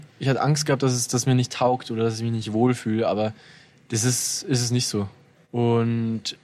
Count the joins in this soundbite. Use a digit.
1